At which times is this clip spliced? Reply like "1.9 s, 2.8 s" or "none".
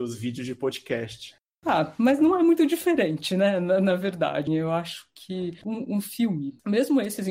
4.5 s